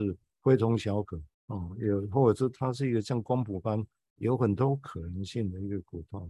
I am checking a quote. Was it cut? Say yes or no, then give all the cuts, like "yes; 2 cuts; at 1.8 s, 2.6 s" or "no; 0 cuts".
yes; 1 cut; at 1.3 s